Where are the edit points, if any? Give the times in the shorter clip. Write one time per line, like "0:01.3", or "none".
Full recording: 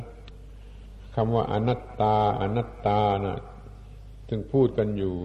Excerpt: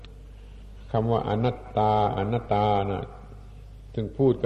0:02.5